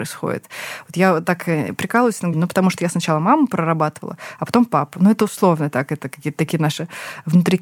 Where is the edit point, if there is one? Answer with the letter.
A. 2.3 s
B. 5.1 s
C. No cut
A